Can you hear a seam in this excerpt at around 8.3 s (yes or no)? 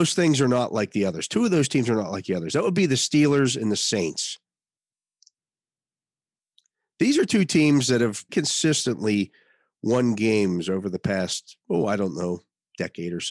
yes